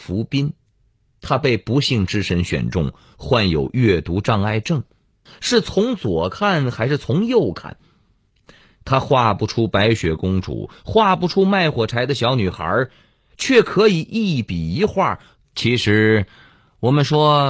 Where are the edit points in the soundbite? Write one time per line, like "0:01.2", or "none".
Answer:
0:05.3
0:15.4